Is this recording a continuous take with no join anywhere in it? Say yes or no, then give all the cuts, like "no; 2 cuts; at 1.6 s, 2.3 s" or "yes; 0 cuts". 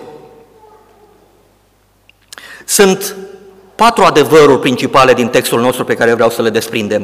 yes; 0 cuts